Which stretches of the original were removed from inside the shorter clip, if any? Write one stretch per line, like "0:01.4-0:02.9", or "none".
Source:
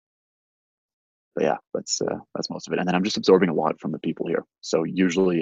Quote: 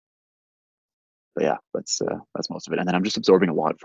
none